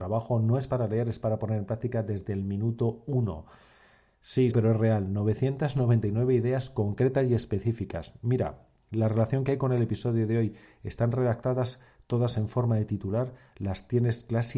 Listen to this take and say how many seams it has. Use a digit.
1